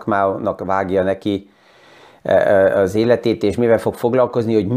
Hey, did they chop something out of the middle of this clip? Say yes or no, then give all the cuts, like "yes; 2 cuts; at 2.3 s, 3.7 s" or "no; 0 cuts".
no; 0 cuts